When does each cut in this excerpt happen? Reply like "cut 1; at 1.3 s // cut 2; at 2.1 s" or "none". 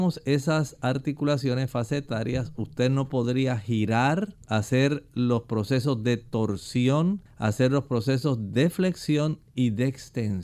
cut 1; at 4.4 s // cut 2; at 7.3 s